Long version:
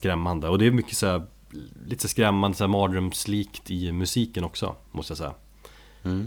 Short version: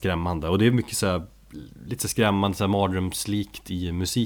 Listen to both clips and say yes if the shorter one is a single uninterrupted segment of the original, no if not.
yes